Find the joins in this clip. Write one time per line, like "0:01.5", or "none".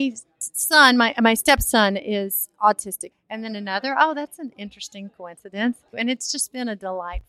0:03.1
0:05.9